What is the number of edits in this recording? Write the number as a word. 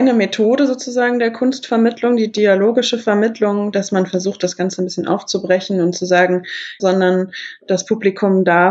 one